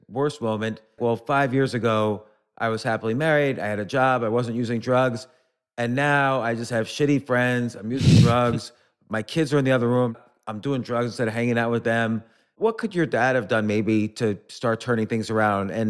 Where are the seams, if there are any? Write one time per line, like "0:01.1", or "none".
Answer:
0:01.0